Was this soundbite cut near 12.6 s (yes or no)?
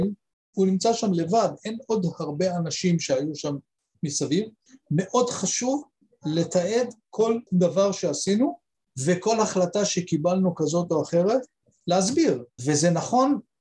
yes